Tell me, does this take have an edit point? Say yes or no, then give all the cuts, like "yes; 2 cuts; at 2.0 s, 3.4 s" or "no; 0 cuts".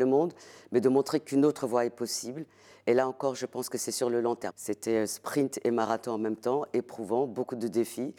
yes; 1 cut; at 4.5 s